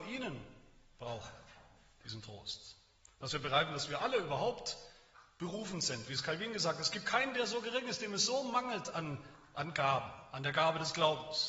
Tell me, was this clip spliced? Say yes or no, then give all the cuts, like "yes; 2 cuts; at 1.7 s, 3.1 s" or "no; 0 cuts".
no; 0 cuts